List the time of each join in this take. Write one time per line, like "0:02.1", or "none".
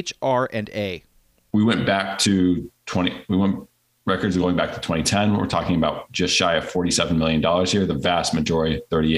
none